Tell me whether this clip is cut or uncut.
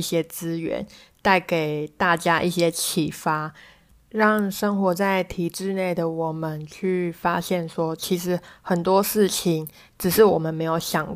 uncut